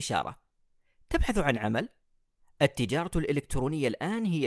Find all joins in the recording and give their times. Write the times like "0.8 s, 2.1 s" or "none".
none